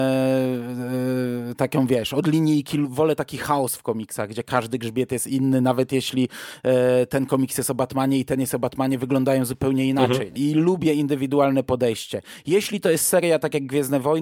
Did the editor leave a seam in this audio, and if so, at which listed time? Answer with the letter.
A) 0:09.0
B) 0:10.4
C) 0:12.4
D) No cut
B